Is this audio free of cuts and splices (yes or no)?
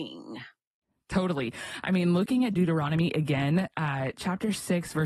yes